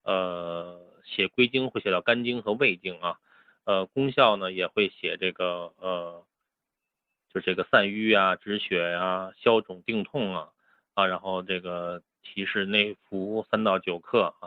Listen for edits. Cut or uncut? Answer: uncut